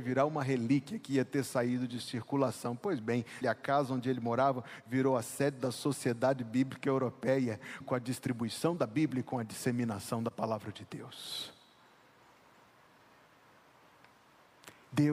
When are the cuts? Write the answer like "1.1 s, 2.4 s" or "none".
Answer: 3.4 s, 7.8 s